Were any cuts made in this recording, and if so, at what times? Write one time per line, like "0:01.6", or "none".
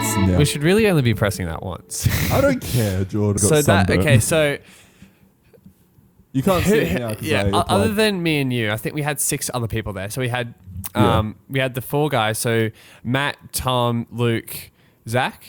0:03.4